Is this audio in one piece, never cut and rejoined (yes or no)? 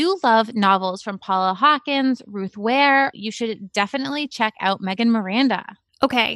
no